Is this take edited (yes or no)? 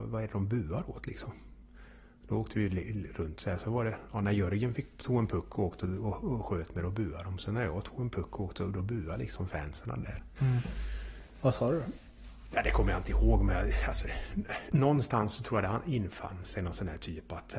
yes